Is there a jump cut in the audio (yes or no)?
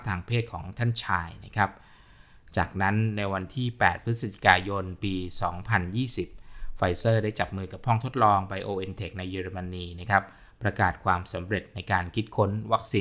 no